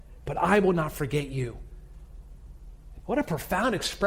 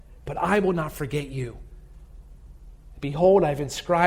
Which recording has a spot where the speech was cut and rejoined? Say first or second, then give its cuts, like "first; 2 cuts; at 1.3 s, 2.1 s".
first; 1 cut; at 3.0 s